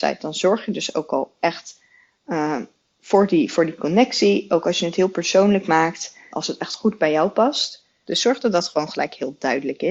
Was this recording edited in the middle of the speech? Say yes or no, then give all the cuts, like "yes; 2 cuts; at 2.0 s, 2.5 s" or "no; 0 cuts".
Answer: yes; 2 cuts; at 6.3 s, 8.0 s